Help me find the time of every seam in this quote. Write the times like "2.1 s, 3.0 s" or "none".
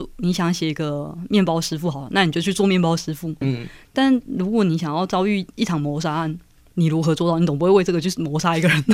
3.4 s